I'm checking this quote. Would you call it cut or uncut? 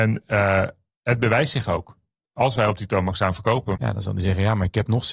cut